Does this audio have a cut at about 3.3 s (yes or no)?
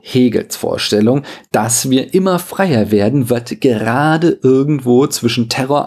no